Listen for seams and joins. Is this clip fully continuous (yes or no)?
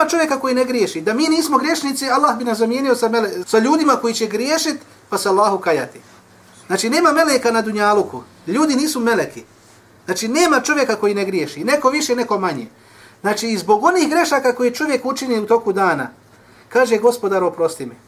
no